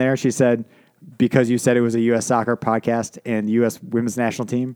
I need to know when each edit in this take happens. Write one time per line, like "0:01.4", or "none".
none